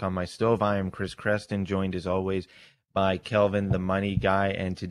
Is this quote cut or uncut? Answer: uncut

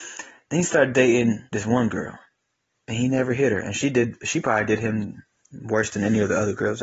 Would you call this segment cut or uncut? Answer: cut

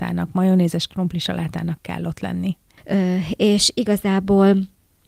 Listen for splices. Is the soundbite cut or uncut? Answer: cut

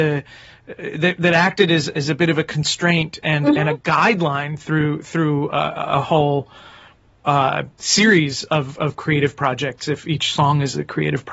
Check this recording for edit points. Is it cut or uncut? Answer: uncut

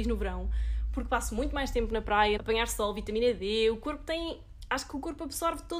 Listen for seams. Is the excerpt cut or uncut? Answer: cut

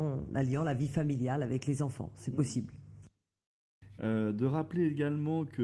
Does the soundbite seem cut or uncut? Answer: cut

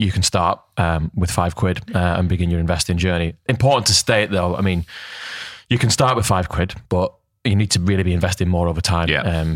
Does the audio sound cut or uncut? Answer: uncut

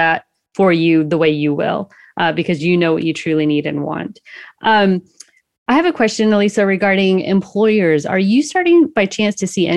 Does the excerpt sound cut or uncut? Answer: uncut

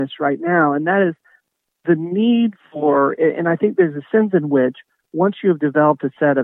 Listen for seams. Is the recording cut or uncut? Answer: uncut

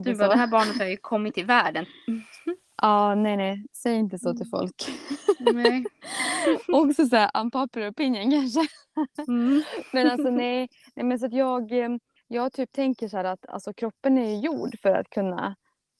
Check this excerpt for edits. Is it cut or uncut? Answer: uncut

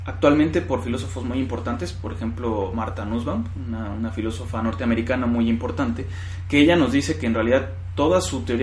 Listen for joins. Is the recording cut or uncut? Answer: uncut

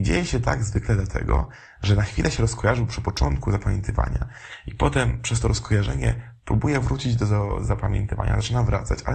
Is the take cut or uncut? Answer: uncut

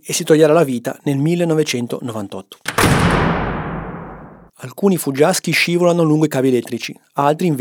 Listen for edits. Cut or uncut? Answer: cut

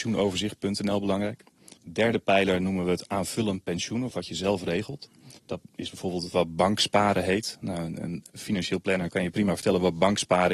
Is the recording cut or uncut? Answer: cut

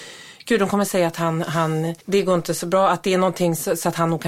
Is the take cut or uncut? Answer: cut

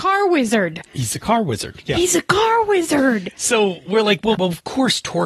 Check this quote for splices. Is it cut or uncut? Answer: cut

